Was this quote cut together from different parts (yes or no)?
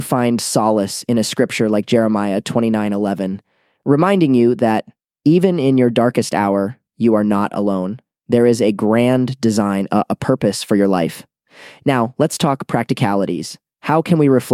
no